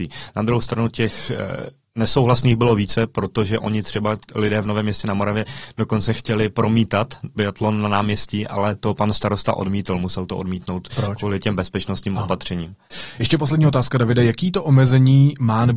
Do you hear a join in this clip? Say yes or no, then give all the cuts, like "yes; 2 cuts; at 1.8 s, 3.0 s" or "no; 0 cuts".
no; 0 cuts